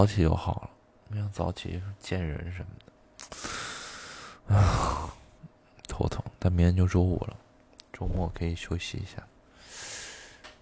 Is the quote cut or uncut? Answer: uncut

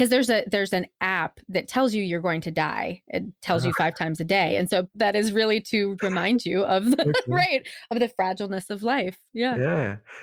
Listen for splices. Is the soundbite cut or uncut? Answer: cut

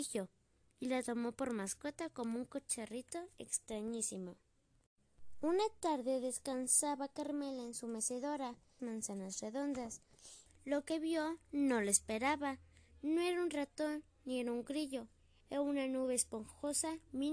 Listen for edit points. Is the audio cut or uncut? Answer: cut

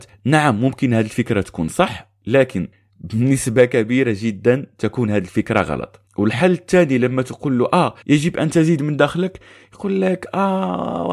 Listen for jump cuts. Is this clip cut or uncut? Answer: cut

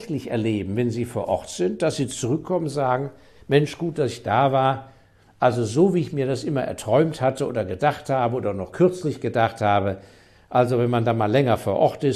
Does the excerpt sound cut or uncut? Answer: uncut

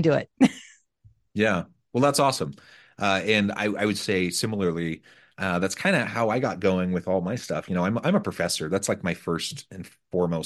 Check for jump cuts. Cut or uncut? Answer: uncut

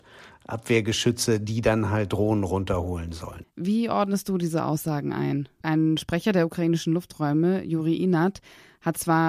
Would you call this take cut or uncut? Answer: cut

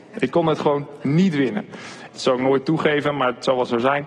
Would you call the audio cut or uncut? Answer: cut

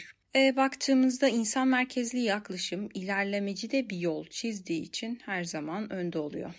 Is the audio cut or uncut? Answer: uncut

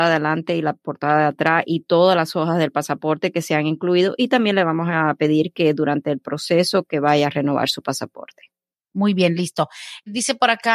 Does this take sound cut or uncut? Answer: uncut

